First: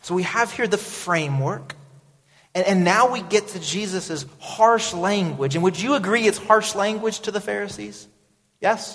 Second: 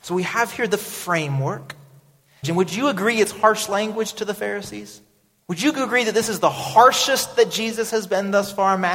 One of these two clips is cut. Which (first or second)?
second